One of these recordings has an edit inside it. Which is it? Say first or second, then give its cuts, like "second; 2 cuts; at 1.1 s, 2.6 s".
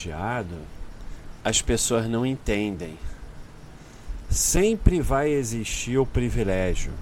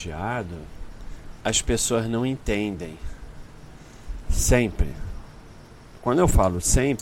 second; 1 cut; at 4.2 s